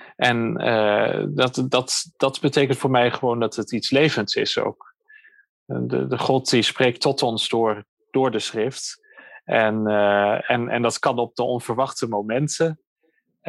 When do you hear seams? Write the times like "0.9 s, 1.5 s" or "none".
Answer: none